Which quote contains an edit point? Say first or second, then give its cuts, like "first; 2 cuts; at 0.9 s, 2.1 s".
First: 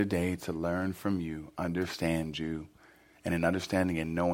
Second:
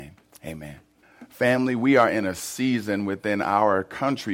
second; 1 cut; at 1.0 s